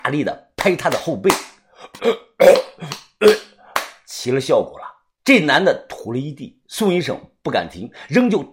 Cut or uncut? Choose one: cut